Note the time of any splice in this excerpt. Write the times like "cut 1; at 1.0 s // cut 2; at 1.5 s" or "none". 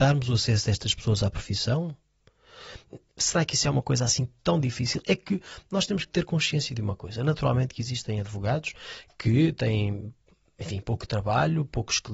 cut 1; at 3.1 s